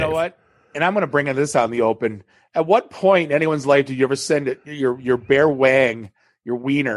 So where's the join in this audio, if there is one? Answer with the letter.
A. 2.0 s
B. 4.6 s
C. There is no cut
C